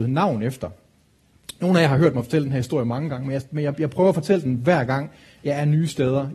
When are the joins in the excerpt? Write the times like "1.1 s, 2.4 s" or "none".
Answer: none